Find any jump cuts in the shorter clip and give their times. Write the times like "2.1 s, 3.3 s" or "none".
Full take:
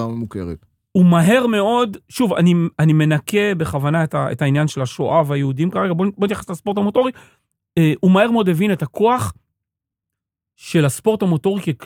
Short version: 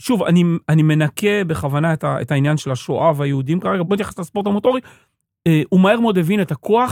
3.8 s

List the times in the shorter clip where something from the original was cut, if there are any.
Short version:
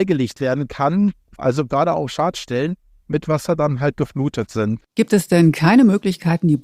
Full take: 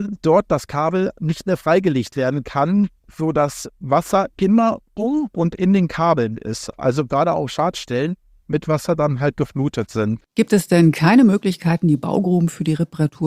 1.4 s

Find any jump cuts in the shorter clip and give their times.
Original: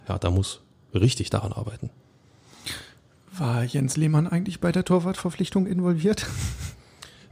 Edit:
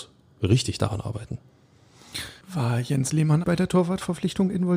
2.4 s, 3.4 s

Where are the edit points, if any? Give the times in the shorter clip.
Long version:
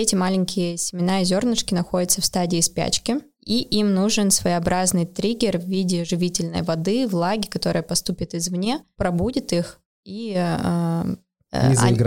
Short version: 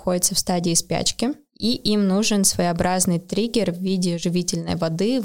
none

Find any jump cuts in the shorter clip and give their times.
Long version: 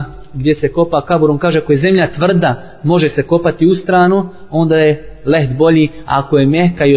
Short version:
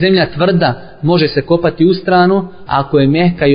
2.7 s

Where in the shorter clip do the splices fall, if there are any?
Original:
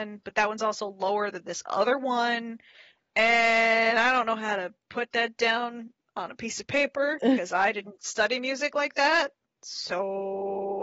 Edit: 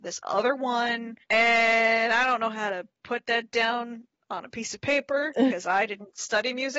1.2 s

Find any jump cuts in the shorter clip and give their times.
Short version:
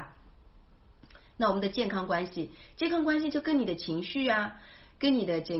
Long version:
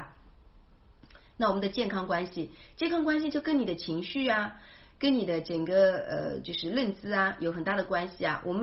none

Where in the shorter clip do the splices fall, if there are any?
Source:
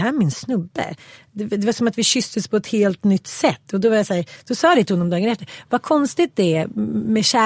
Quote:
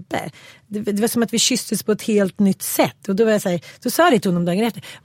none

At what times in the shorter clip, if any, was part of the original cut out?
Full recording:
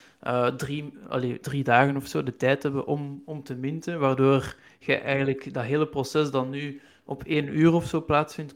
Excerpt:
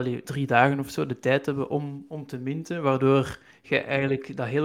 none

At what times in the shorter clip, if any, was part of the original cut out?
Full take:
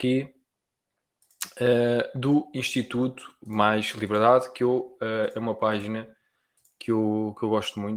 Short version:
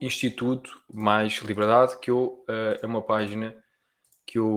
none

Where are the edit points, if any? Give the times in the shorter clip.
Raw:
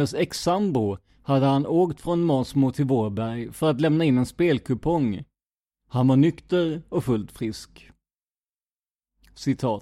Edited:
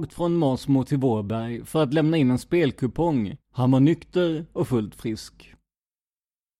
3.4 s

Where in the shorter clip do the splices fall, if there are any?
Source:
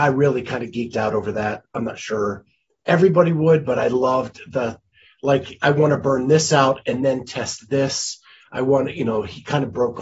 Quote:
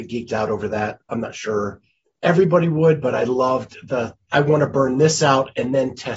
4.3 s

